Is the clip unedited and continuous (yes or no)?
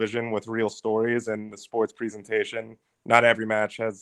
yes